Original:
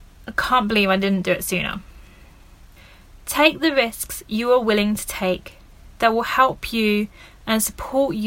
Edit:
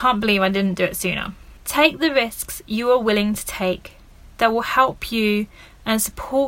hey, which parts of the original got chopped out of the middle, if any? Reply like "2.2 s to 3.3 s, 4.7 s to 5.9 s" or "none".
2.0 s to 3.2 s

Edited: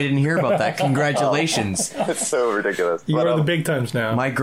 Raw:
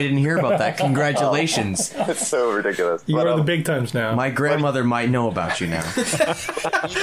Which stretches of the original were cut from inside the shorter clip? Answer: none

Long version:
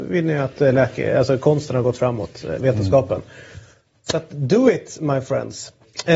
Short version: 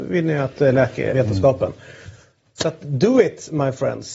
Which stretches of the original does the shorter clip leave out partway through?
1.1 s to 2.6 s

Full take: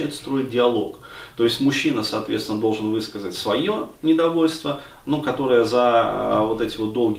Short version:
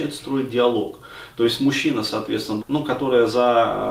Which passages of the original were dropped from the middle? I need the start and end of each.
2.6 s to 5.0 s

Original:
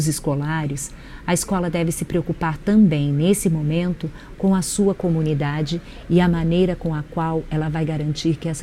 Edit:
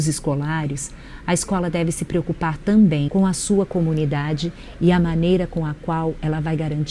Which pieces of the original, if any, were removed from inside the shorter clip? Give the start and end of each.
3.1 s to 4.4 s

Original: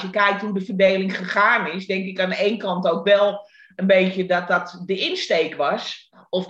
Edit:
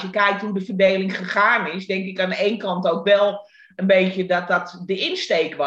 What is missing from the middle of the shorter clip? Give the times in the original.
none

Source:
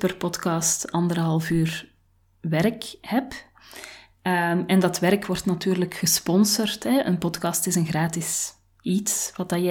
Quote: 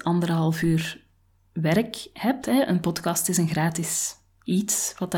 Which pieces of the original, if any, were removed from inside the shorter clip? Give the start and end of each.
3.3 s to 6.8 s

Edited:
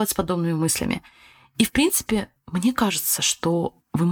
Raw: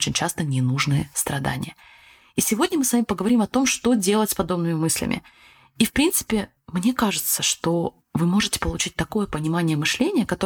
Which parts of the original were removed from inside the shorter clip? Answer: none

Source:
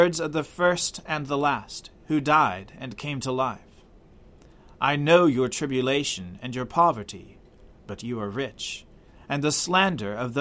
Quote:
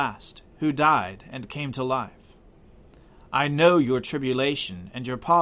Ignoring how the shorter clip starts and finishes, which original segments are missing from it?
none

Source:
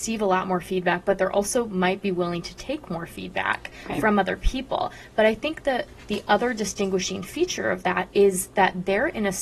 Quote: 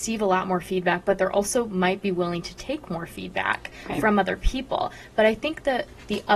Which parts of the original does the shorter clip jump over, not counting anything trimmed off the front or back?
none

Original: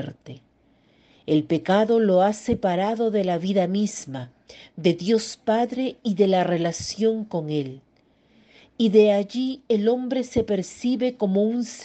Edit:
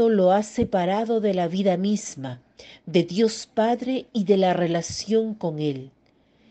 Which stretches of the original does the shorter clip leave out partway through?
none

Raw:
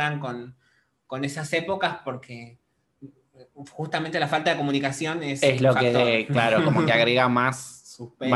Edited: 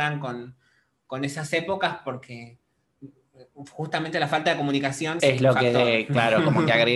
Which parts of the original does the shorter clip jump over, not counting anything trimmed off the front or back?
5.2 s to 5.4 s

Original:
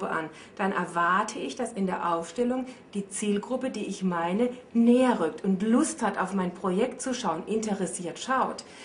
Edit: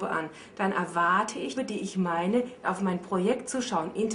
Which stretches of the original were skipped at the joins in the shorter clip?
1.5 s to 3.6 s, 4.7 s to 6.1 s

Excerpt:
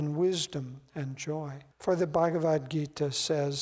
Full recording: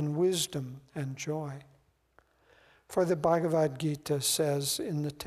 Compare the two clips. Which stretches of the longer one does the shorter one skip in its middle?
1.7 s to 2.8 s

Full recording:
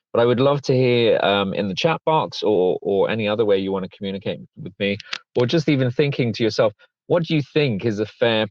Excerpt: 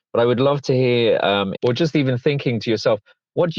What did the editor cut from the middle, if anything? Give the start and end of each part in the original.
1.5 s to 5.3 s

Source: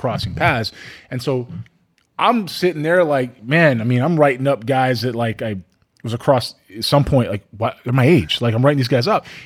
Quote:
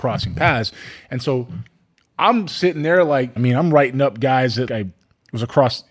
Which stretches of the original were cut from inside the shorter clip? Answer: 3.4 s to 3.8 s, 5.1 s to 5.4 s

